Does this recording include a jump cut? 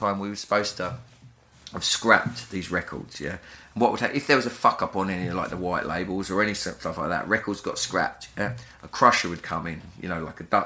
no; 0 cuts

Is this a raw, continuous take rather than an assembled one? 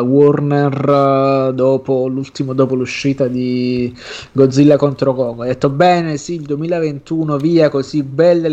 yes; 0 cuts

